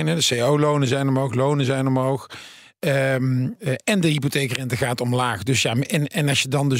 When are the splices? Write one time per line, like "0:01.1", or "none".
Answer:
none